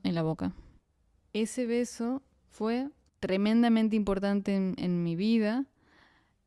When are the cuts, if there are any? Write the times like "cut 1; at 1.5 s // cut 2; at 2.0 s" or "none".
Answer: none